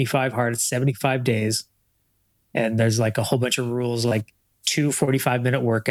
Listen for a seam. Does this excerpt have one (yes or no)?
no